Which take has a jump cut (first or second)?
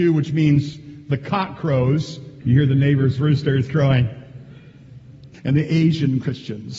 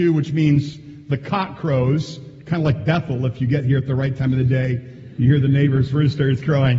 first